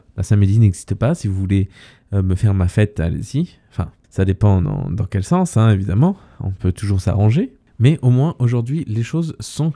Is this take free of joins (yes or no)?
yes